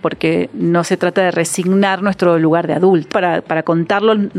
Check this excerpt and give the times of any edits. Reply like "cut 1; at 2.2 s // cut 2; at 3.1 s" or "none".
cut 1; at 3.1 s